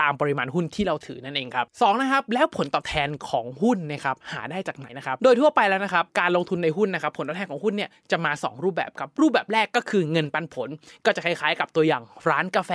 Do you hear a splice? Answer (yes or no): yes